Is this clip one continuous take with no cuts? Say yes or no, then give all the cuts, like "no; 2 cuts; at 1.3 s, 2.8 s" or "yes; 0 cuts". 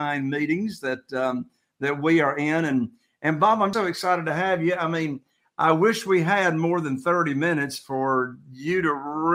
no; 1 cut; at 3.7 s